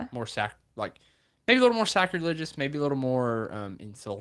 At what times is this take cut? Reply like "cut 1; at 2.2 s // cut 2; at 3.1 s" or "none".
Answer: none